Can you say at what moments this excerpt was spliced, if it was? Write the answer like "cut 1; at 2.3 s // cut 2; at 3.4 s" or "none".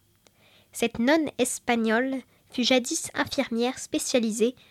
cut 1; at 2.4 s